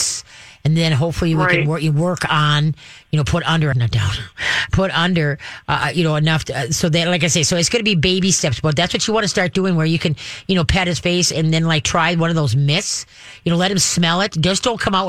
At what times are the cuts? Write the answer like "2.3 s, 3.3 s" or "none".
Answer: 3.7 s